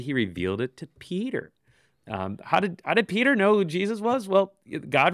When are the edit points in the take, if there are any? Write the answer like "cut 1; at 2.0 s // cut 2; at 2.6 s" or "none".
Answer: none